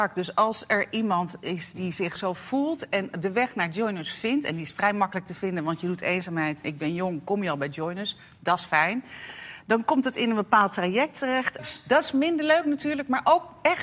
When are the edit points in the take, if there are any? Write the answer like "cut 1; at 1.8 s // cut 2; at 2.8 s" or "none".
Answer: cut 1; at 6.6 s // cut 2; at 11.6 s